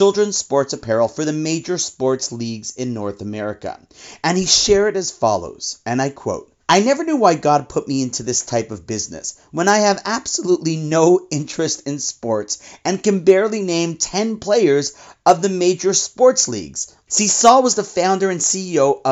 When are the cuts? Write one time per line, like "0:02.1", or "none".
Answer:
0:06.6
0:17.1